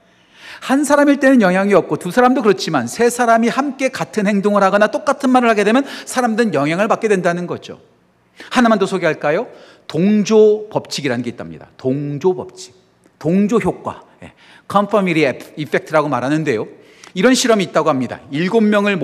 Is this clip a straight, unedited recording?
yes; 0 cuts

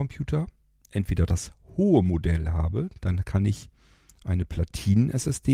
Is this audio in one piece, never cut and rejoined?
yes; 0 cuts

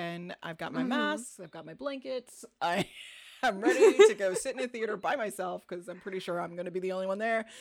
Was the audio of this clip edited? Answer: no; 0 cuts

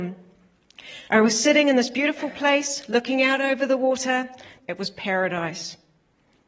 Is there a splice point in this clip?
yes; 2 cuts; at 1.1 s, 4.6 s

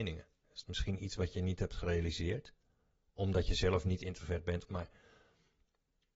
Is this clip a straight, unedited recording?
no; 1 cut; at 4.7 s

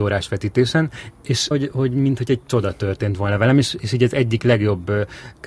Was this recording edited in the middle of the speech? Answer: yes; 1 cut; at 1.5 s

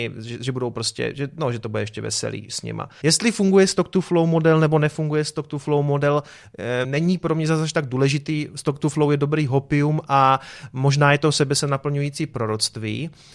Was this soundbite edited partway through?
yes; 2 cuts; at 3.0 s, 6.8 s

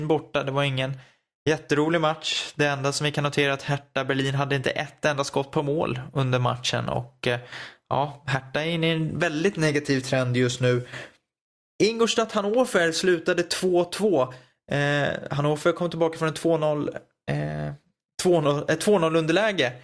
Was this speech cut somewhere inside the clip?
no; 0 cuts

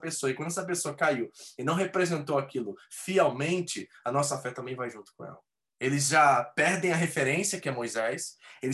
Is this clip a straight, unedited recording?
no; 1 cut; at 5.6 s

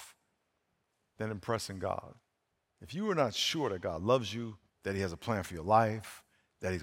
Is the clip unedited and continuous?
no; 2 cuts; at 2.7 s, 4.7 s

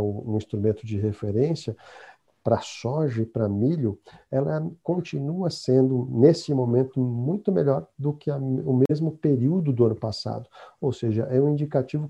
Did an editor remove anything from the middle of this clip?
no; 0 cuts

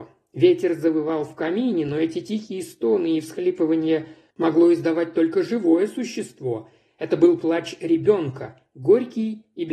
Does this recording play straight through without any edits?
no; 1 cut; at 4.3 s

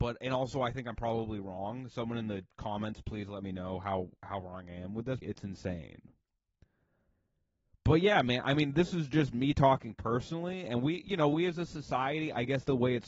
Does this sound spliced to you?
yes; 1 cut; at 5.2 s

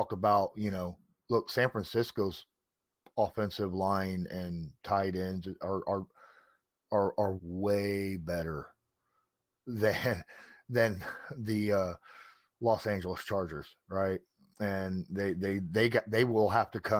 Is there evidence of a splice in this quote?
yes; 1 cut; at 7.4 s

